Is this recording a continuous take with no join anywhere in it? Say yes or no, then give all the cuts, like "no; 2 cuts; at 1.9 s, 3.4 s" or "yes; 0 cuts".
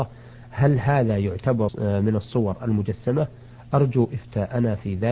no; 1 cut; at 1.7 s